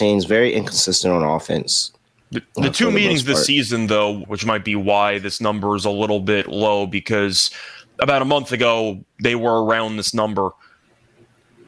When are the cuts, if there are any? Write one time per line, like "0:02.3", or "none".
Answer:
0:04.2